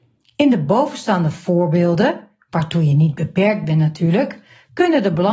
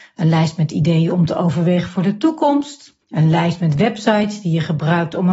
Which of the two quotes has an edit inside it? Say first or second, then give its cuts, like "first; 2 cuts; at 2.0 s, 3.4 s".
second; 1 cut; at 3.0 s